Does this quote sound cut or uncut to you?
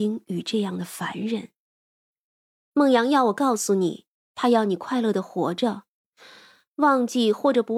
uncut